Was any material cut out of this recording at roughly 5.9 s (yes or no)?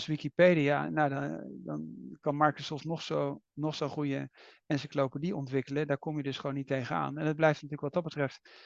no